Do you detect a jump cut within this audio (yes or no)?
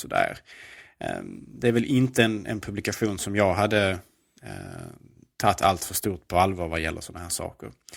no